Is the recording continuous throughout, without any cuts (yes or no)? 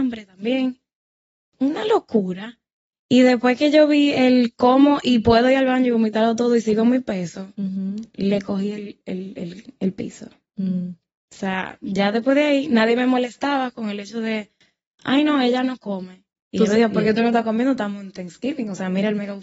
no